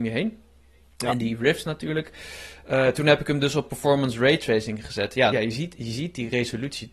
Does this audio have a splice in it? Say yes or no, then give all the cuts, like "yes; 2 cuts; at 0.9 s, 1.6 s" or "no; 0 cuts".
yes; 1 cut; at 5.3 s